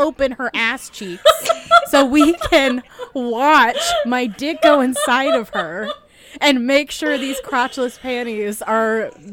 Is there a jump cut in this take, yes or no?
no